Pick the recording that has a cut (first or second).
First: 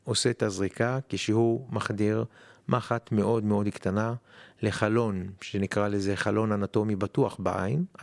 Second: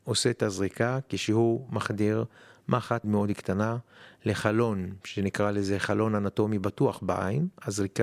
second